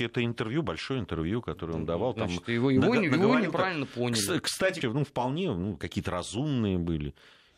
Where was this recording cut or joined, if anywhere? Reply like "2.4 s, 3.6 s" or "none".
4.8 s